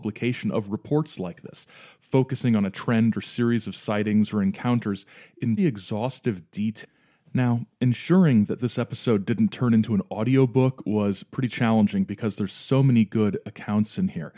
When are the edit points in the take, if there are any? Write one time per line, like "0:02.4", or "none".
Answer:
0:05.6